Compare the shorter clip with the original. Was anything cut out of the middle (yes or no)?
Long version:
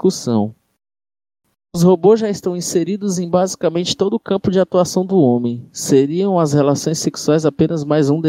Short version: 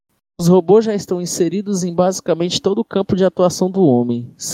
no